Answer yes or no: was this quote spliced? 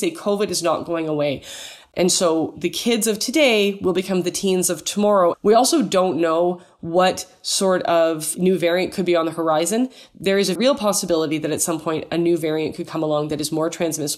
yes